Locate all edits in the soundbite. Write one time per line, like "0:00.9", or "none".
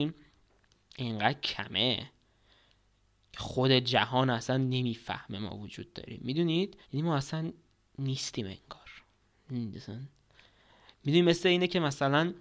0:06.8